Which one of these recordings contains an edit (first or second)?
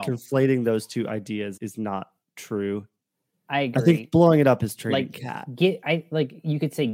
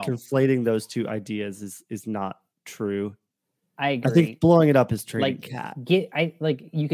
first